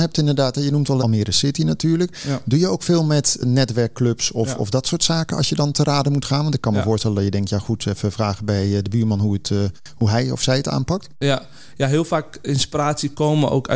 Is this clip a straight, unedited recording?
no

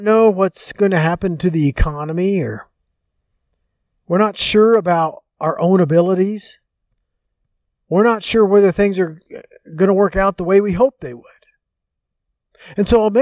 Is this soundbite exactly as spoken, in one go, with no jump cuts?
yes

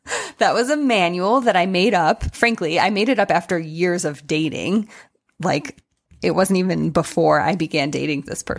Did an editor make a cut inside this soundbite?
no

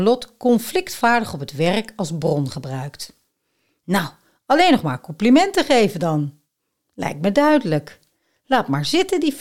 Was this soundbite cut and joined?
no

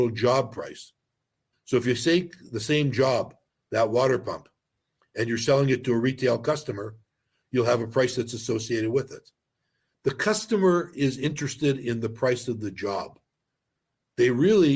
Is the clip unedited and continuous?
no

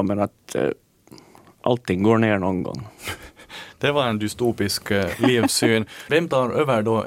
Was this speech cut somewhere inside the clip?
yes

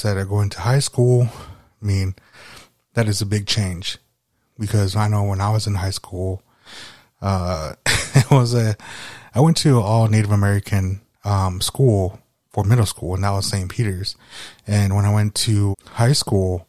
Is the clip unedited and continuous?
no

